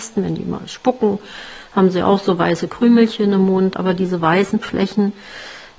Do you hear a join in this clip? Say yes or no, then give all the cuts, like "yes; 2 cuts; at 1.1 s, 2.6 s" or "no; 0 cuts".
yes; 1 cut; at 3.7 s